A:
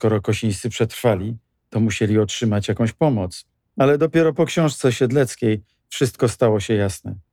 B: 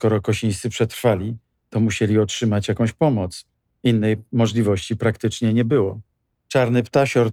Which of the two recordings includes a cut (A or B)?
A